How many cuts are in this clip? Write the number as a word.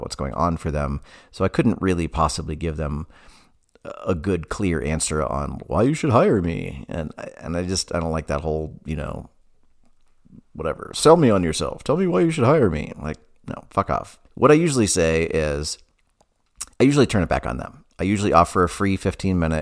two